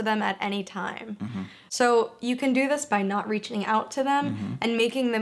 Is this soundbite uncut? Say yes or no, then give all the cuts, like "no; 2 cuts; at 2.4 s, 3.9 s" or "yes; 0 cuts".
yes; 0 cuts